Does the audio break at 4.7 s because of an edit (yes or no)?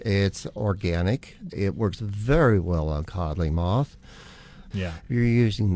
yes